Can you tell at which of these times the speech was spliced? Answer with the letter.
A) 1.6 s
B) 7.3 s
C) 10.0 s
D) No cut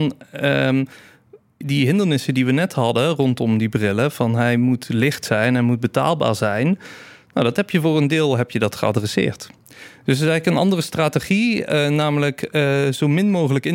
A